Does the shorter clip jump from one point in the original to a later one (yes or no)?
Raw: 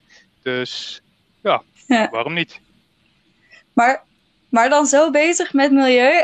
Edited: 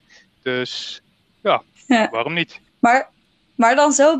yes